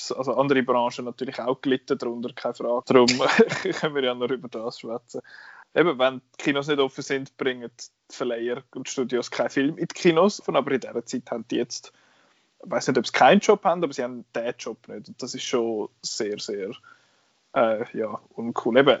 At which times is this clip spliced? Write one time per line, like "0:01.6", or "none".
0:02.8
0:05.6
0:10.4